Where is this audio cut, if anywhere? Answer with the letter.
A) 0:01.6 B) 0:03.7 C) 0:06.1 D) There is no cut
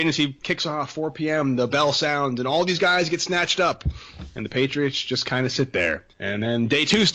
C